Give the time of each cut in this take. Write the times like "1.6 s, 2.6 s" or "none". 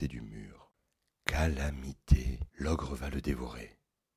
2.5 s